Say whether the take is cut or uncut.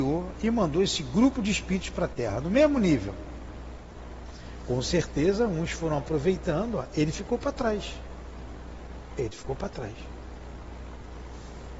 uncut